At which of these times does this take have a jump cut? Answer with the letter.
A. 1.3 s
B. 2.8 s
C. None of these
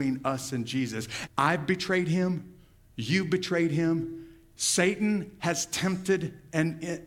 A